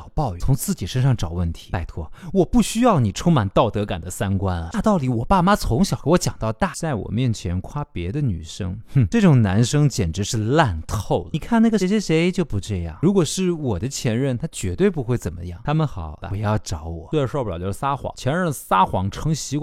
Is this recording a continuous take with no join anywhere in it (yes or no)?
no